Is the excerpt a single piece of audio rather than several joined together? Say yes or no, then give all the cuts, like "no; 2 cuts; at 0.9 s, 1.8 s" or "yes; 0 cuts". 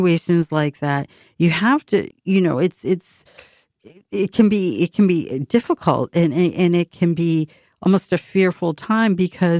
no; 1 cut; at 2.1 s